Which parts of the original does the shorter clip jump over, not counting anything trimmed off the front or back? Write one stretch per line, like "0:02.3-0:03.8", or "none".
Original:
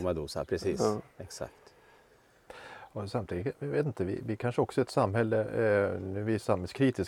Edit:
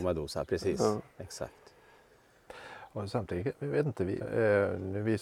0:04.2-0:05.4